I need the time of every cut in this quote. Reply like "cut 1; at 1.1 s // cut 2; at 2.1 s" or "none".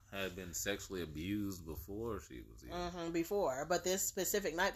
none